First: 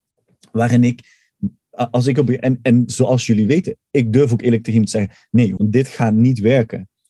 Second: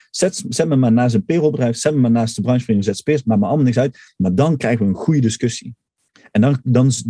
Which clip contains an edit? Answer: first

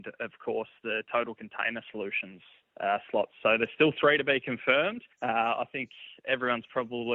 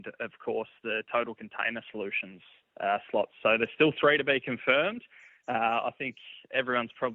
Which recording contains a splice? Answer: first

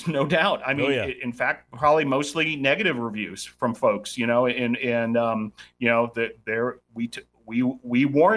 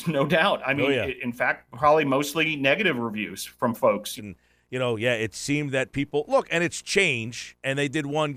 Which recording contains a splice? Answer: second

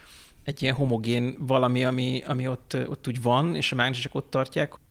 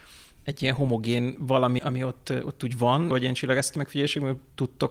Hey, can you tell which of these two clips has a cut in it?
second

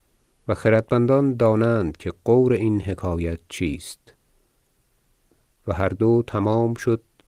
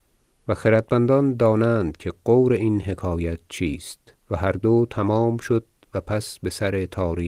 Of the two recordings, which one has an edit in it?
second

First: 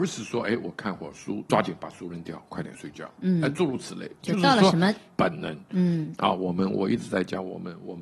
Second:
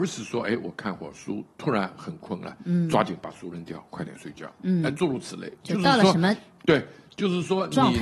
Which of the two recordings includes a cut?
first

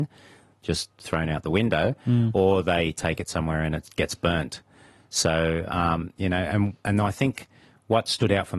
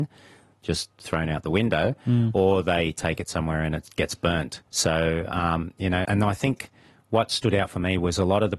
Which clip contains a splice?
second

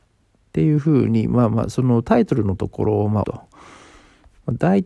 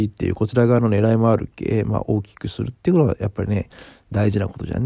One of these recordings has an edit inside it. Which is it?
first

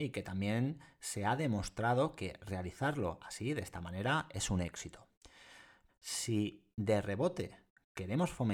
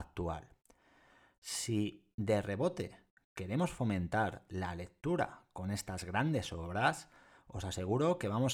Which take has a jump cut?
first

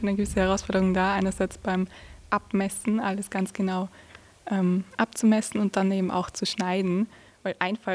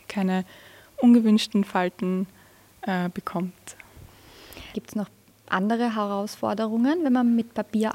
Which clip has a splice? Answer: second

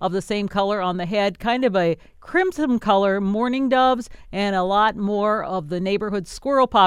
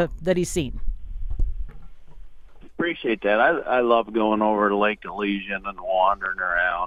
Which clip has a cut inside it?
second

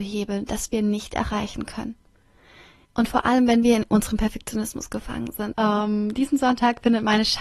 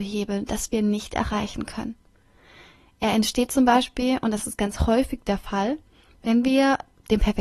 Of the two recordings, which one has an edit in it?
first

